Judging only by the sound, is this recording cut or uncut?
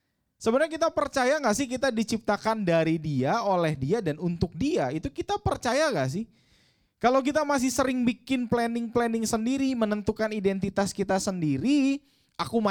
uncut